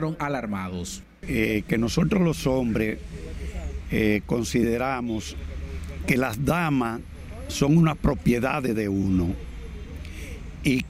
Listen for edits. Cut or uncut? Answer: uncut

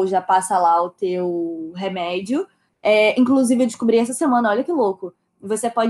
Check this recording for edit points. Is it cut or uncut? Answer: cut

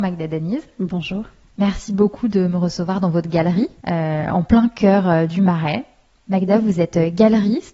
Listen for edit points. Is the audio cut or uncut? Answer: uncut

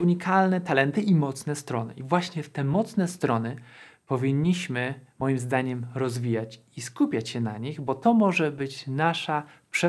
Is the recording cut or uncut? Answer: uncut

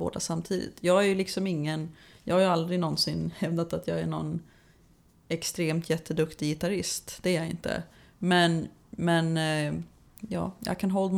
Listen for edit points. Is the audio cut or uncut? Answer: uncut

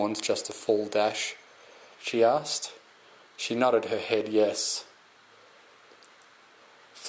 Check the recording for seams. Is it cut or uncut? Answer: cut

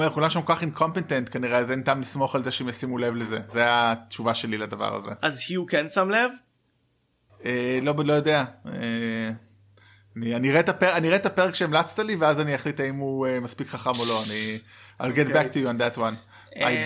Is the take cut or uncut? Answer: uncut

